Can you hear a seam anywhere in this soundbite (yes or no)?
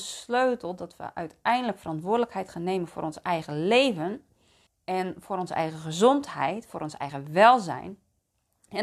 yes